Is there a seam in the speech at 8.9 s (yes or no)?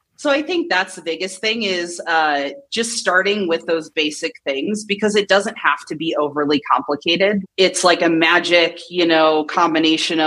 no